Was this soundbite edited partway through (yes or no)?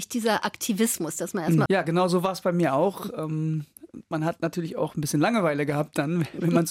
yes